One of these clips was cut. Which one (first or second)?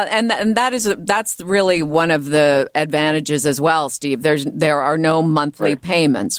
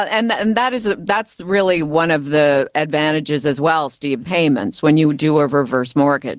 second